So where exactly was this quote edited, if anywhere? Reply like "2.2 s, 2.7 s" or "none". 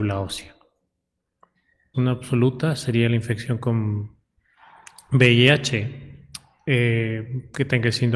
1.9 s

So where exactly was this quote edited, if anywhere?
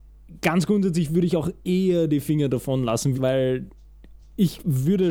3.1 s

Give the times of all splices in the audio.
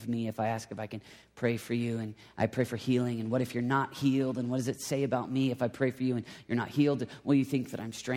none

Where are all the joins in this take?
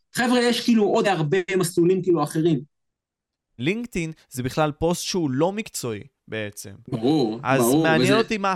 1.0 s, 3.6 s

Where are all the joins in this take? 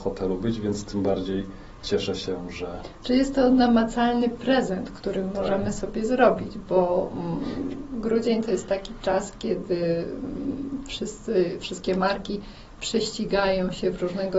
none

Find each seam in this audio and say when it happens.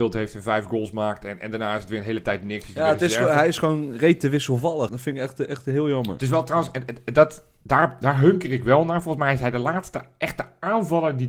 4.9 s

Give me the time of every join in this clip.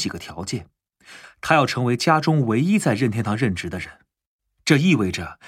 1.2 s

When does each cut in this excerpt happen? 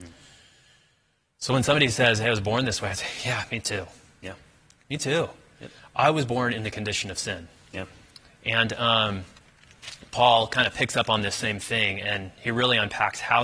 none

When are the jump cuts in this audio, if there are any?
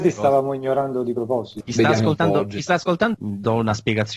1.6 s, 3.1 s

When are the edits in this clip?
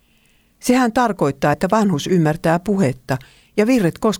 none

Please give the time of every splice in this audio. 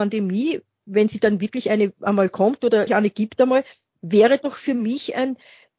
2.9 s

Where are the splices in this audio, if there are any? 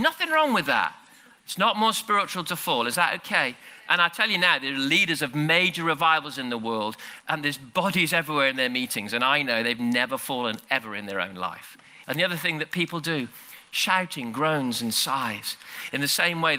12.0 s

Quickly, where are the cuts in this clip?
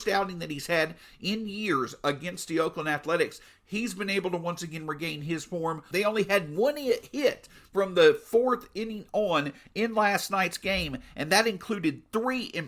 5.9 s

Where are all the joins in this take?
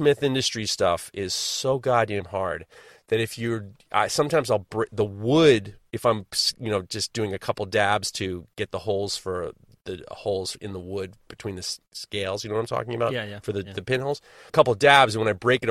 14.5 s

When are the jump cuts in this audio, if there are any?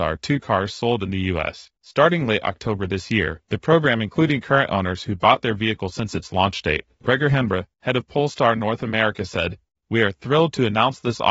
1.8 s

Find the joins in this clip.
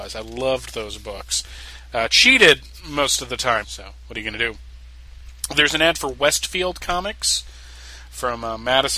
3.6 s

